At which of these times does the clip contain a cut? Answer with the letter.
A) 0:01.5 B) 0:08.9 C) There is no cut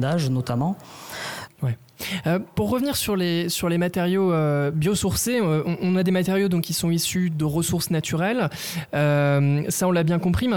A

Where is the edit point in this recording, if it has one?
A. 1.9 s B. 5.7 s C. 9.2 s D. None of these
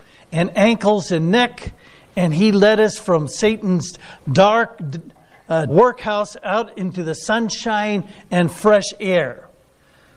B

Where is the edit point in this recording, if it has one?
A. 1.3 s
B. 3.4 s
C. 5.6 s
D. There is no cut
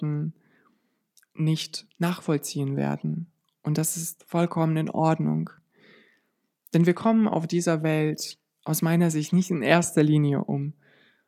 D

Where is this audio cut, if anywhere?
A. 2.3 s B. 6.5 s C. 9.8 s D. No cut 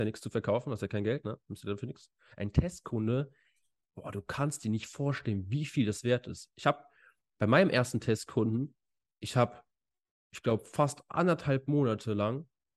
A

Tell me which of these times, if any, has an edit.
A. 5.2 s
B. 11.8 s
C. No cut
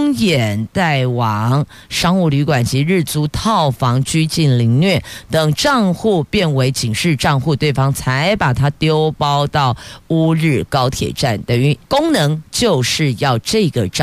B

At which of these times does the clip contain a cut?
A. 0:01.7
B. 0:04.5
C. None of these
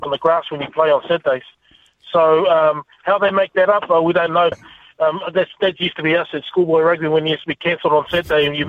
B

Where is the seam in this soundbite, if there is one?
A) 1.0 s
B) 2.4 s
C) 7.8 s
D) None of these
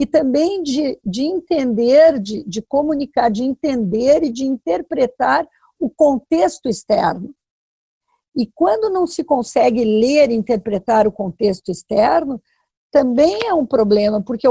D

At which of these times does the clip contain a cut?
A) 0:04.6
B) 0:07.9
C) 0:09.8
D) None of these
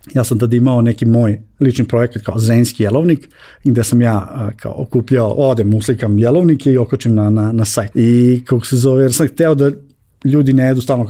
B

